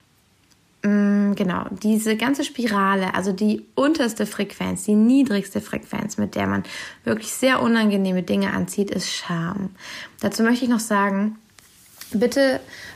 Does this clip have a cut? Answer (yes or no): no